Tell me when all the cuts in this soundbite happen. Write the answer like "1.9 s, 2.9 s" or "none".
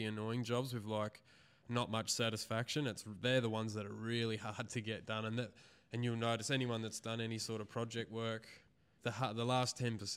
9.0 s